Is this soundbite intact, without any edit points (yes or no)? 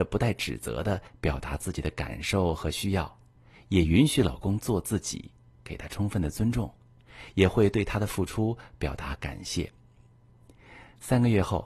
yes